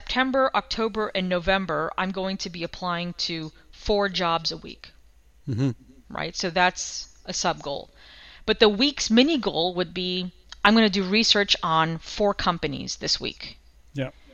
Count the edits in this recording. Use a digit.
0